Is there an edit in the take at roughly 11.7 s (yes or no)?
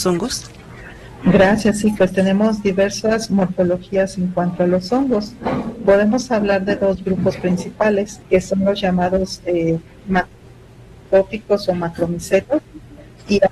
no